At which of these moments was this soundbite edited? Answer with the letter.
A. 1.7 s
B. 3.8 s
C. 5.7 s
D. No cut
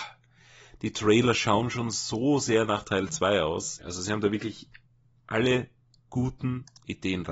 B